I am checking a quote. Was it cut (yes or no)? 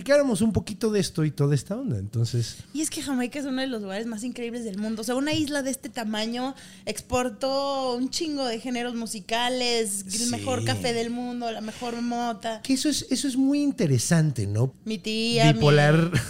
yes